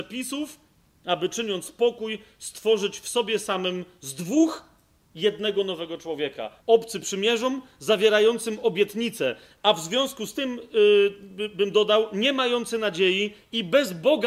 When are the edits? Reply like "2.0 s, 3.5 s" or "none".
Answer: 6.6 s